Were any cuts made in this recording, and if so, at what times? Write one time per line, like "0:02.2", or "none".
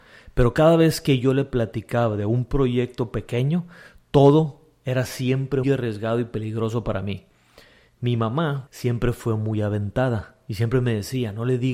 0:05.6
0:08.7